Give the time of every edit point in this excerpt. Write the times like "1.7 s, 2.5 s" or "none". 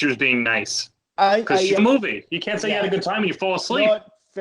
1.8 s